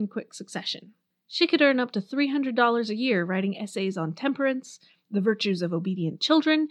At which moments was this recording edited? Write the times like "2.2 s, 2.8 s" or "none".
1.1 s